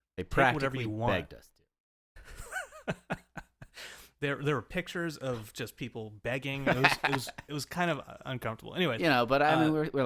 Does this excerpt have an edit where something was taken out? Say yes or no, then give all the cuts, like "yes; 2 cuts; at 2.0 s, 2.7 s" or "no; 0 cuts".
no; 0 cuts